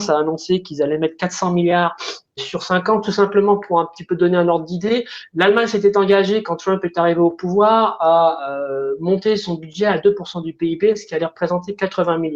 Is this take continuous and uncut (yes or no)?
no